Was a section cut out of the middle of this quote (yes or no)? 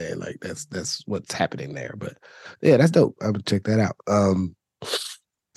no